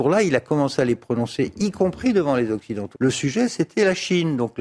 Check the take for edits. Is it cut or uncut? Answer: cut